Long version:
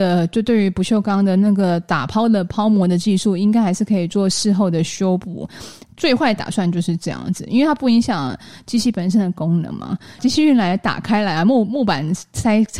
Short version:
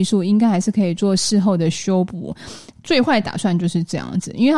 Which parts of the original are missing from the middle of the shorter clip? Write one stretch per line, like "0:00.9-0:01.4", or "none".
none